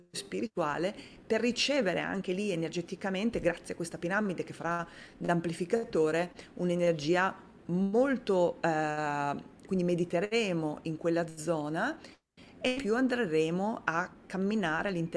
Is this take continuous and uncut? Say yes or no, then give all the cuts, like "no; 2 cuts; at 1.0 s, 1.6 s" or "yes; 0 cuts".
no; 1 cut; at 9.7 s